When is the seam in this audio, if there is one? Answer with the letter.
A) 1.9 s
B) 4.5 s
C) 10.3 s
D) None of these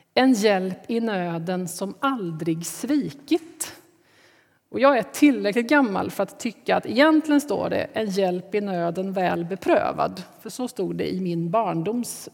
D